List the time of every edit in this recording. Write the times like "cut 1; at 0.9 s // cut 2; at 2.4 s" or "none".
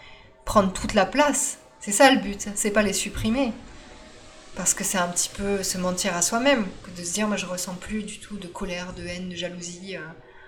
none